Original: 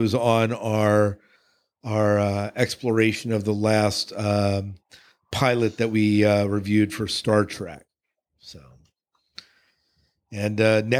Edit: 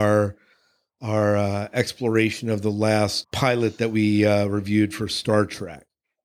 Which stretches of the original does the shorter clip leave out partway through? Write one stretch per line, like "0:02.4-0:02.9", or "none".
0:04.1-0:05.2